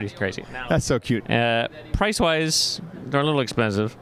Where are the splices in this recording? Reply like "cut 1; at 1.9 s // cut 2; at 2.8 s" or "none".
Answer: cut 1; at 1.2 s